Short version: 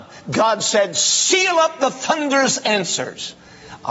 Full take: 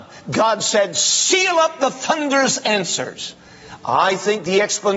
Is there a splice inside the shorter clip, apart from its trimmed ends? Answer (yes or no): no